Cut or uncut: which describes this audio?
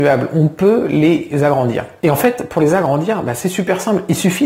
uncut